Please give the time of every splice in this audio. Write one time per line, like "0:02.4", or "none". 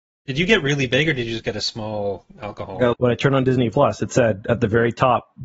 0:02.9